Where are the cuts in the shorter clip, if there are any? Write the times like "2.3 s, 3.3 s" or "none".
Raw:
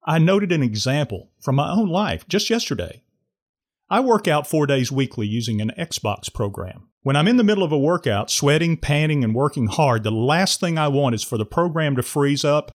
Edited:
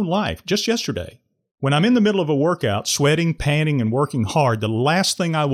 1.5 s